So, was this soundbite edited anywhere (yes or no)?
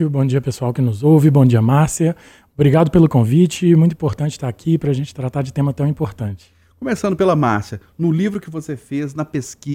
no